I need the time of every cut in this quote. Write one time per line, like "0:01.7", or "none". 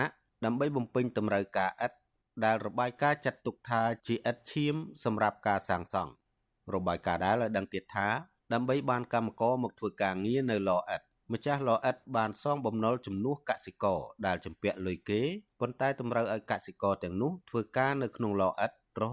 0:07.2